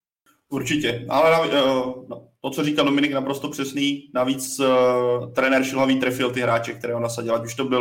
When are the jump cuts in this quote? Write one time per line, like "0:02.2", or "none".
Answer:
none

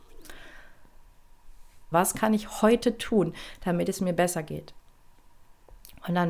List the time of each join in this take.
0:01.9

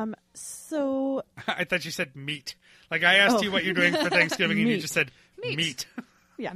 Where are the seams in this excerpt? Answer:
none

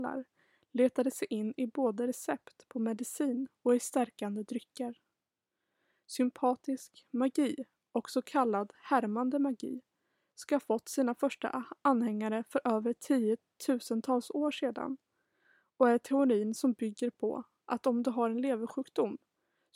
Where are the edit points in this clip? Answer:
none

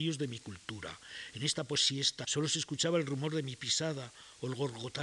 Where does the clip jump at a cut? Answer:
0:02.2

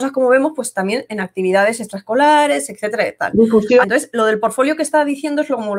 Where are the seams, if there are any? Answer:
0:03.8

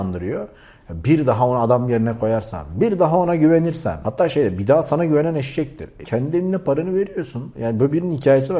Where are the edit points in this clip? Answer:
0:06.0
0:07.5

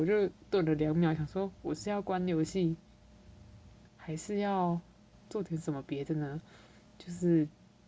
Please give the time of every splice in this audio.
none

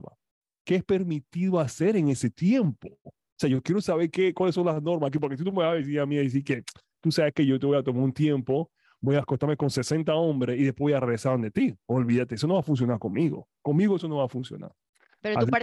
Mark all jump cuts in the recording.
none

